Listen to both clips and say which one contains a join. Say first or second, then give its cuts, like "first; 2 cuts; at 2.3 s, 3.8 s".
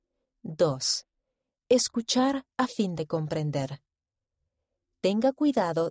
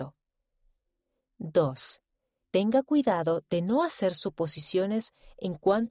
second; 1 cut; at 2.4 s